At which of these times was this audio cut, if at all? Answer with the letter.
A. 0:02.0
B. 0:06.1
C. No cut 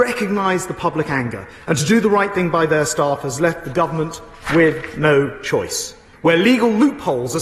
B